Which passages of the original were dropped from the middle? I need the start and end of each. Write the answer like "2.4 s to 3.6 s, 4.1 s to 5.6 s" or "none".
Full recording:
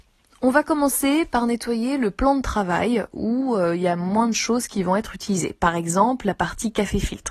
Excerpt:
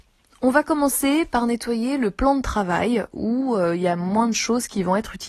none